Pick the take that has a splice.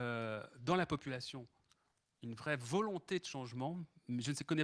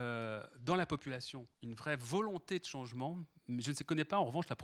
second; 1 cut; at 1.5 s

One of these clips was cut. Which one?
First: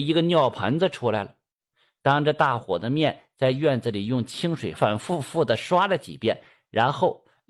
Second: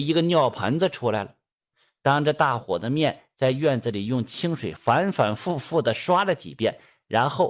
first; 1 cut; at 4.8 s

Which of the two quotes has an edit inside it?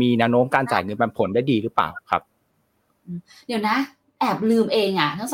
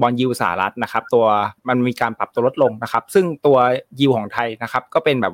second; 1 cut; at 1.6 s

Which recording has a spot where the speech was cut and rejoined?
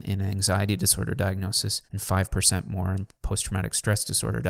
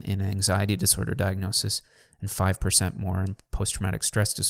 first; 1 cut; at 1.9 s

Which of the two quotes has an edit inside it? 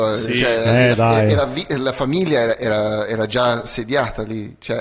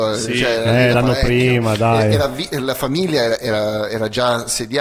first; 1 cut; at 0.9 s

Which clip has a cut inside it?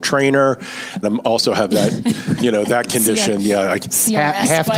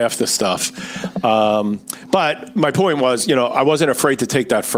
first; 1 cut; at 1.0 s

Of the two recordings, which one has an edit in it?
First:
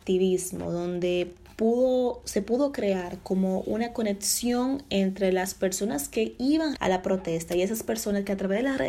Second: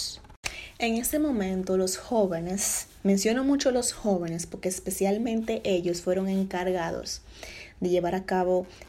first; 1 cut; at 6.8 s

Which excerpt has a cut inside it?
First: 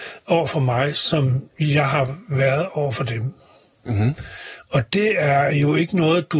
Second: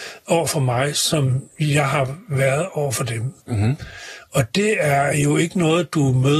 second; 1 cut; at 3.4 s

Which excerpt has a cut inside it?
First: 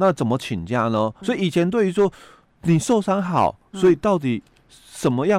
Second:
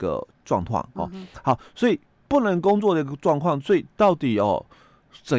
first; 1 cut; at 1.2 s

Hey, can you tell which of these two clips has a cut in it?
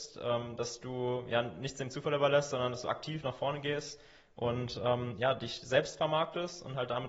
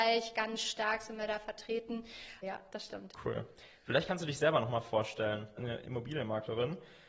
second; 2 cuts; at 2.4 s, 5.6 s

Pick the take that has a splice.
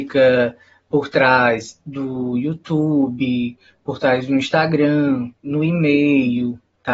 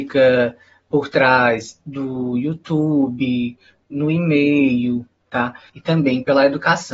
second; 2 cuts; at 3.8 s, 5.7 s

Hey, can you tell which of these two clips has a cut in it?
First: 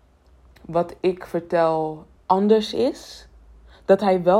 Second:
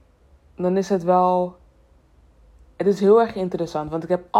first; 1 cut; at 2.2 s

